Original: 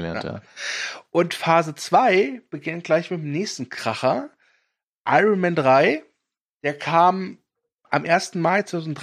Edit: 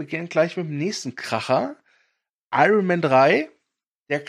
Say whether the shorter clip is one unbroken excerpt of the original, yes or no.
yes